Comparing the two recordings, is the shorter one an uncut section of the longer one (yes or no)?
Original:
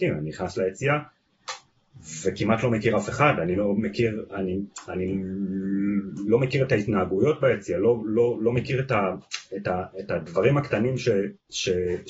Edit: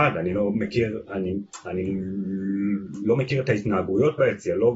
yes